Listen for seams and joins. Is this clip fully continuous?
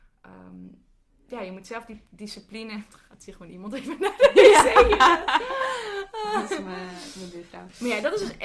yes; 0 cuts

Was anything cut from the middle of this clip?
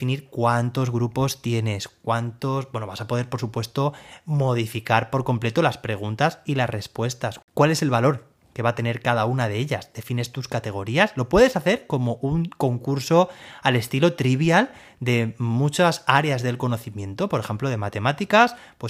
no; 0 cuts

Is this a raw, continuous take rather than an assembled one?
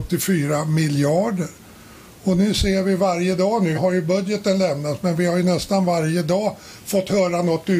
no; 1 cut; at 3.7 s

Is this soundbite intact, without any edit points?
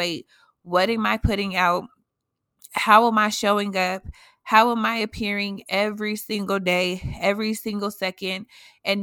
yes; 0 cuts

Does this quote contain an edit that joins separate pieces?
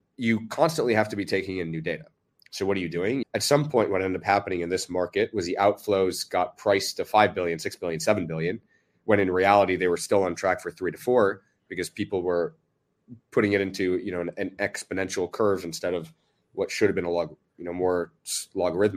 yes; 1 cut; at 3.2 s

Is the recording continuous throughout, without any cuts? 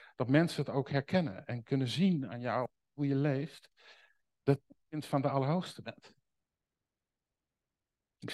yes; 0 cuts

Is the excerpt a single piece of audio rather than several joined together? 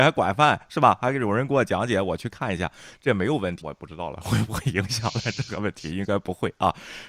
no; 1 cut; at 3.6 s

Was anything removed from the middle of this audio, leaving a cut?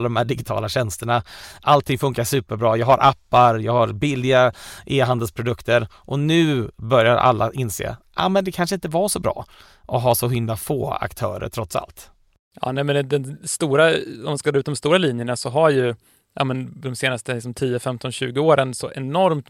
no; 0 cuts

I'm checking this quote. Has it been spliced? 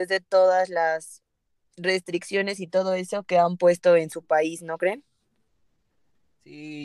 no; 0 cuts

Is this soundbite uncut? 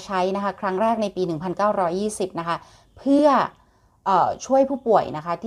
yes; 0 cuts

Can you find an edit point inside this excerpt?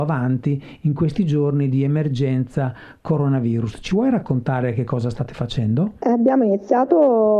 no; 0 cuts

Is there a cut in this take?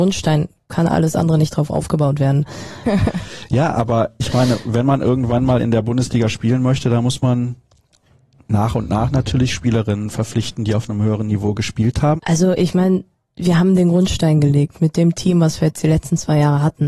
yes; 2 cuts; at 2.8 s, 12.2 s

